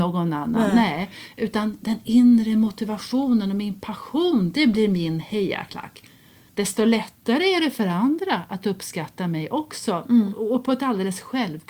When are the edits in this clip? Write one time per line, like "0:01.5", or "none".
0:06.5